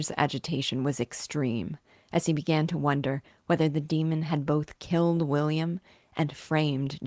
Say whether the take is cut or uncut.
uncut